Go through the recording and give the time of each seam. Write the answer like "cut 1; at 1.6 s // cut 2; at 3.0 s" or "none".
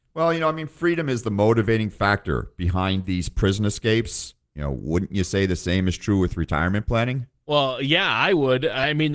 cut 1; at 4.4 s